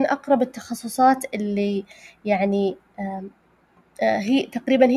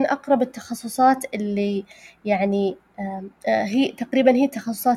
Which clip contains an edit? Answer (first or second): second